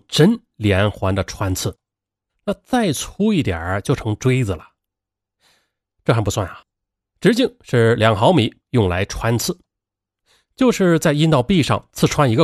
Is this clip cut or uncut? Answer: cut